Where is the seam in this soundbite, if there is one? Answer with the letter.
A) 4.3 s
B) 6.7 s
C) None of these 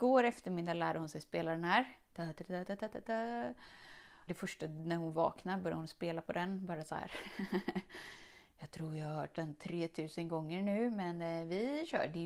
A